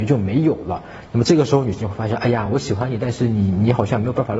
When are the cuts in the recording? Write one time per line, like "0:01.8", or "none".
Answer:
none